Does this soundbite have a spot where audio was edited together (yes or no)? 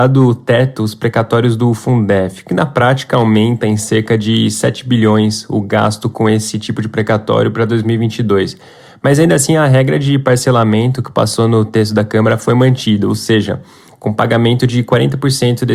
no